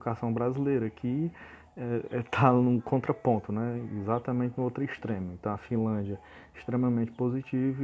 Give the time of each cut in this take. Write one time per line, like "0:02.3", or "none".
none